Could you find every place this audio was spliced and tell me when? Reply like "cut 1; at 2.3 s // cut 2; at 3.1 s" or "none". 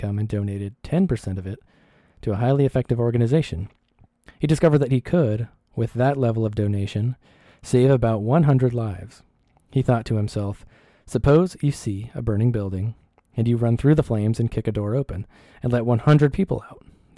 cut 1; at 4.3 s